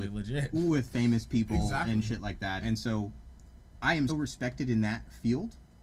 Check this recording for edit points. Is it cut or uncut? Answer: cut